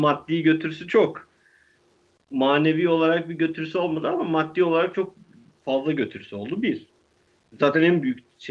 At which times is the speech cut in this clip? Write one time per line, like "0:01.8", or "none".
none